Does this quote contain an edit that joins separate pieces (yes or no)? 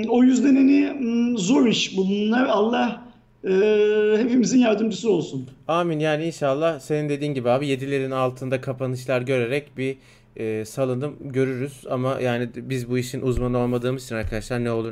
no